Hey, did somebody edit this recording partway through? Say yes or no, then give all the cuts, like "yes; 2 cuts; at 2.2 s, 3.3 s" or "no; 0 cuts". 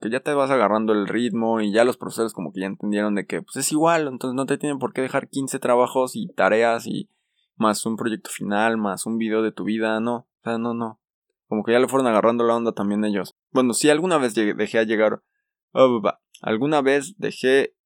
yes; 1 cut; at 13.3 s